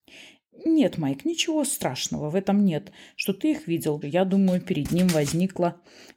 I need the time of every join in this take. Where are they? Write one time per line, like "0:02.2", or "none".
0:04.0